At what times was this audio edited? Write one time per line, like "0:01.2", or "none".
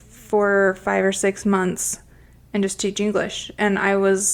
none